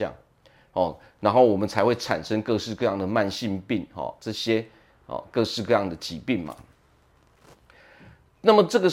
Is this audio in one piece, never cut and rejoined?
no; 1 cut; at 4.2 s

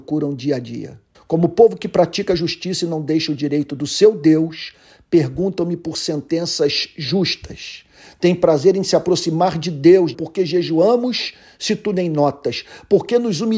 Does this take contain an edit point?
yes; 2 cuts; at 1.1 s, 10.1 s

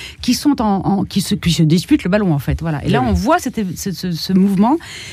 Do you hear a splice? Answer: no; 0 cuts

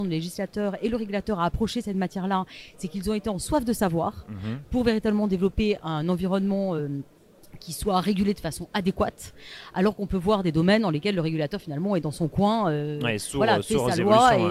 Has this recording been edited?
no; 0 cuts

